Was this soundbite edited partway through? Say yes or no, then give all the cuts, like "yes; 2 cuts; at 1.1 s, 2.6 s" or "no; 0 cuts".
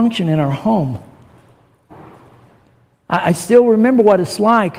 no; 0 cuts